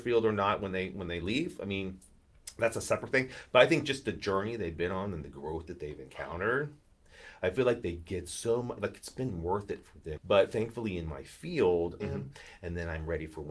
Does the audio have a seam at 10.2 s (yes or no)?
yes